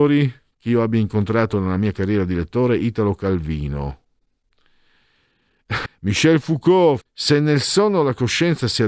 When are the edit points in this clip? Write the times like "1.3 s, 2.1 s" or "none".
5.9 s, 7.0 s